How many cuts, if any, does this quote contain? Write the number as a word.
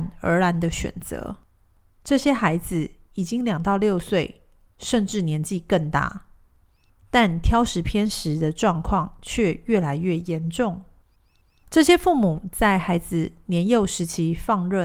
one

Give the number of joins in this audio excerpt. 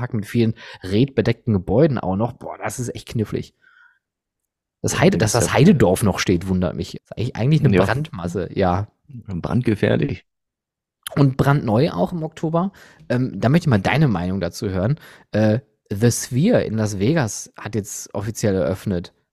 one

